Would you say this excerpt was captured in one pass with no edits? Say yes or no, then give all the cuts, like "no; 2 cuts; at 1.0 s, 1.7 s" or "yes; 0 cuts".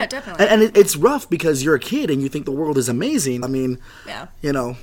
no; 1 cut; at 3.4 s